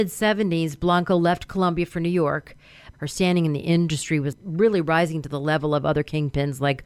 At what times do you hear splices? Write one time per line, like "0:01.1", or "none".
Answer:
0:02.9